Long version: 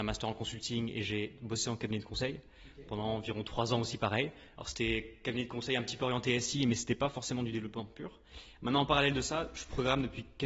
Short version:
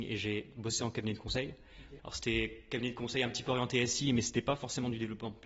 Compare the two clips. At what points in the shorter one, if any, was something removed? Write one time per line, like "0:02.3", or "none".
0:02.0